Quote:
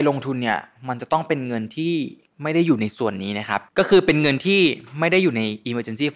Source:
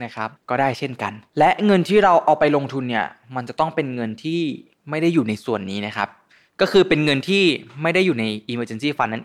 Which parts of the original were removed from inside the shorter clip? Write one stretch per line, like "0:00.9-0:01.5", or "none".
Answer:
0:06.2-0:06.5

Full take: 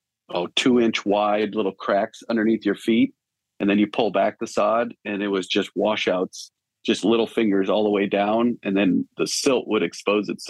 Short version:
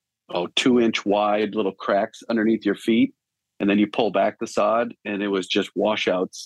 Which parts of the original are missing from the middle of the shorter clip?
none

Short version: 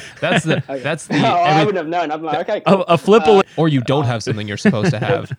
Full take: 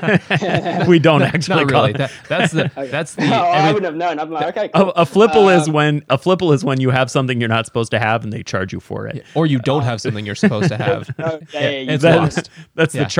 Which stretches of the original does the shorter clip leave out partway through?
0:05.5-0:09.2

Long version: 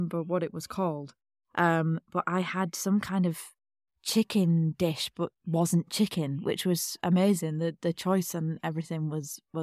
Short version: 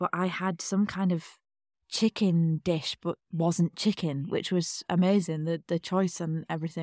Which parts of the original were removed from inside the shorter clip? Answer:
none

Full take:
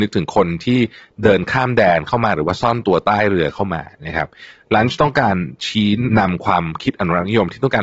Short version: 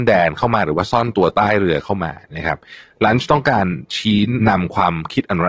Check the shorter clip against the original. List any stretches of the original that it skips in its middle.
none

